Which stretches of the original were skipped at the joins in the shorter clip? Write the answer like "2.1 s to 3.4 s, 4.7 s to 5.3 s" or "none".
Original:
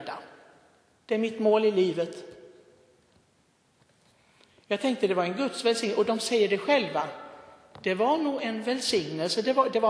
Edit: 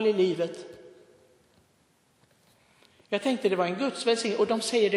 none